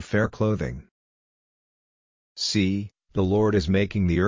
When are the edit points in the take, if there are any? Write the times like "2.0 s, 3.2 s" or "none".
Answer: 2.2 s